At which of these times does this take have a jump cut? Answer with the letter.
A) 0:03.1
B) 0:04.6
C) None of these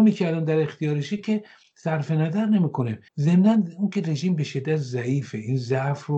A